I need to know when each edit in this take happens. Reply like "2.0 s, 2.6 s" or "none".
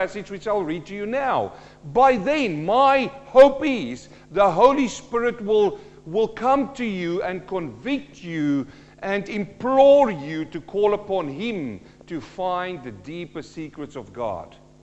none